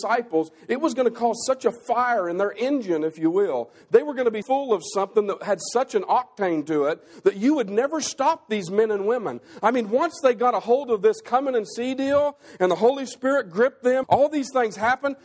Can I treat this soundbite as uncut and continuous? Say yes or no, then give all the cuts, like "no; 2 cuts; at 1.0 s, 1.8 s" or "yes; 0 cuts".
no; 2 cuts; at 4.4 s, 14.0 s